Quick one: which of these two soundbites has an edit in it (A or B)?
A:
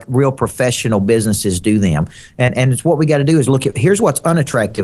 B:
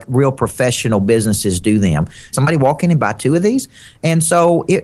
B